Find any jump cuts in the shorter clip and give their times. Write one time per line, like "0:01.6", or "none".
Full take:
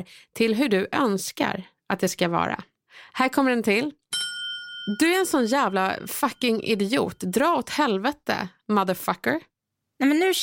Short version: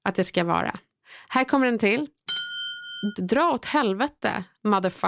0:03.1